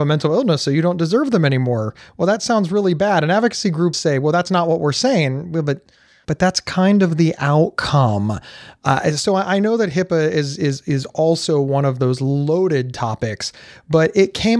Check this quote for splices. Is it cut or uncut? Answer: cut